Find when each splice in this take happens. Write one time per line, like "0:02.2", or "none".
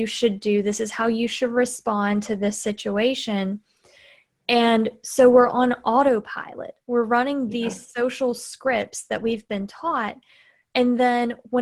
none